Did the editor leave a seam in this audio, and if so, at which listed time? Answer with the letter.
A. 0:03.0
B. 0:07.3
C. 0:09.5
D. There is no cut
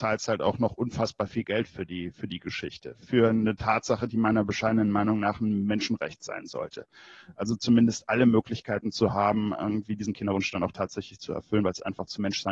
D